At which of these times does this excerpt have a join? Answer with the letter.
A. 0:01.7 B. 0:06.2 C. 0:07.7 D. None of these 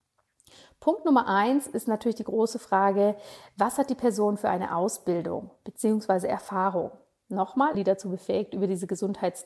C